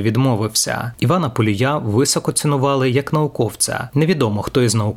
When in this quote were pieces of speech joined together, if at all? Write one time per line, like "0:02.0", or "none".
0:00.9
0:03.9

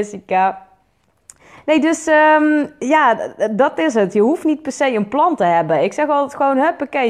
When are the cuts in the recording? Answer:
none

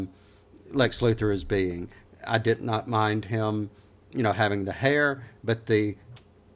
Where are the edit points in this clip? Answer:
0:02.1

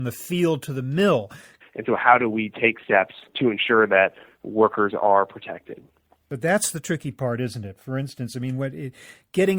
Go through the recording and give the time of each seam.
0:01.6

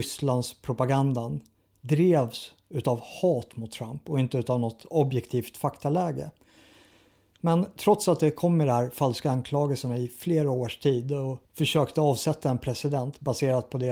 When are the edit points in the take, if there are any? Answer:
0:11.4

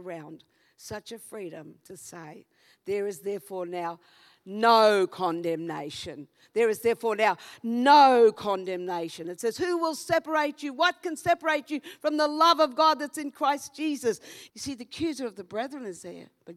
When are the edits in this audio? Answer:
0:14.5

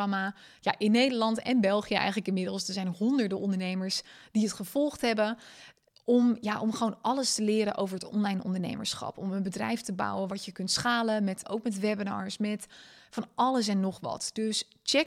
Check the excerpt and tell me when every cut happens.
0:11.4

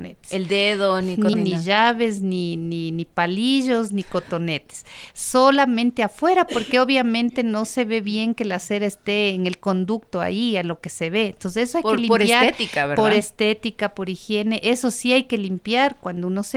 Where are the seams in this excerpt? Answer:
0:01.3

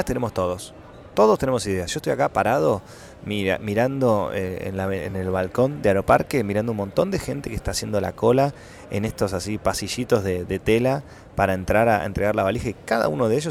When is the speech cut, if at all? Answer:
none

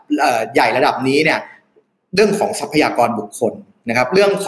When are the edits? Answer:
none

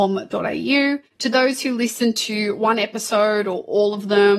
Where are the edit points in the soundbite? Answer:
none

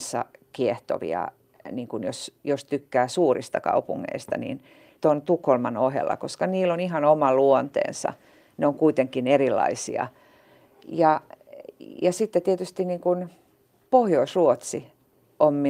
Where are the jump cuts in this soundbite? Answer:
none

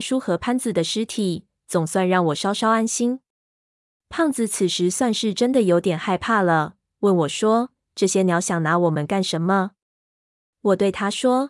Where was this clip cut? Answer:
none

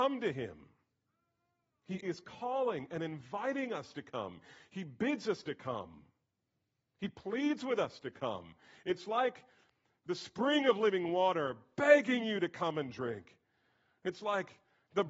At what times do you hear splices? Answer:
0:02.0

